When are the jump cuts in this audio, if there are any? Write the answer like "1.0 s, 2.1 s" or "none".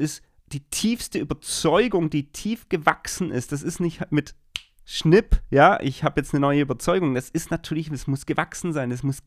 none